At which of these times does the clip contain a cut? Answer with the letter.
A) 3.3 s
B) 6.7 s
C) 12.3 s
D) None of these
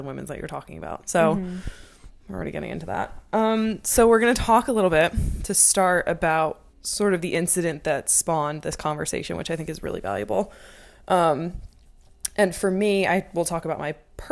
B